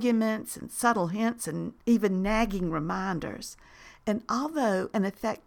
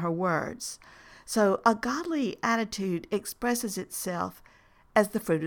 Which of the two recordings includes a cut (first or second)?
first